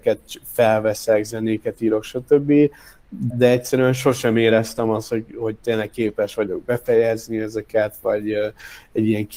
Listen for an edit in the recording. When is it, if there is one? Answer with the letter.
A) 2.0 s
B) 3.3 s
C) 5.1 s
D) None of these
B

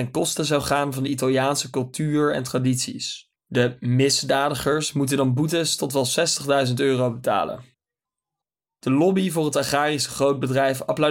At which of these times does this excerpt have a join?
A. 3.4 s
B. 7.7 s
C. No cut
A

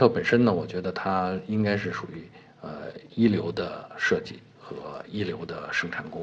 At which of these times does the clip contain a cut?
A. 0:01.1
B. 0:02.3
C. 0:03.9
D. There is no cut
D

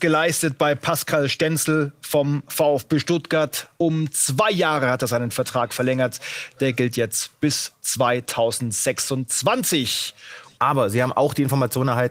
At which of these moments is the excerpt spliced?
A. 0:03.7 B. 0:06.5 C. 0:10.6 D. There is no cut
C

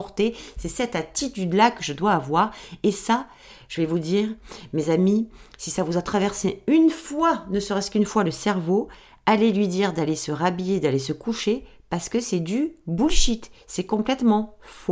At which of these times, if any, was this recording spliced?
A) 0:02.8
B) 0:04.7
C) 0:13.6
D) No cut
D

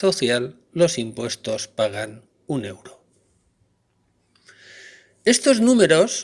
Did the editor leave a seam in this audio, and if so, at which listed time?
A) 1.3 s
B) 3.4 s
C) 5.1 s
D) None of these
D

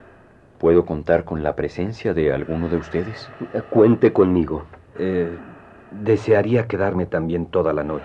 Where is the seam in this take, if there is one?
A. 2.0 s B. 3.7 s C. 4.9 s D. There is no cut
C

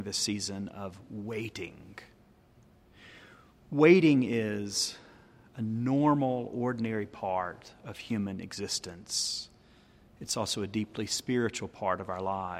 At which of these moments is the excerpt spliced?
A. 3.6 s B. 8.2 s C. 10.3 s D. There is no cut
D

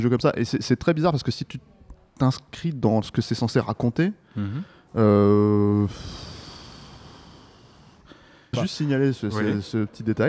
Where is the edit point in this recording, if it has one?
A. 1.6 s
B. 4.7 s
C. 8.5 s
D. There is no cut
C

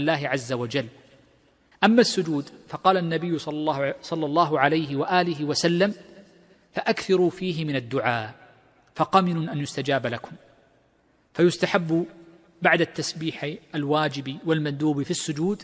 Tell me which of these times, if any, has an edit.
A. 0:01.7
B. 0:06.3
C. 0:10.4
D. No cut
A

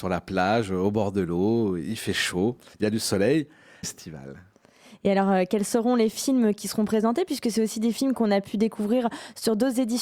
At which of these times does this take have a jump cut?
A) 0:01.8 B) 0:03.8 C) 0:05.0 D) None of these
B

